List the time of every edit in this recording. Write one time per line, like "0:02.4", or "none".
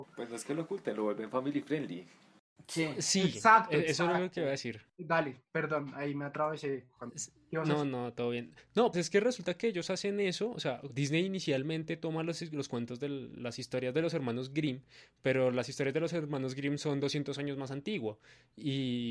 0:08.9
0:10.9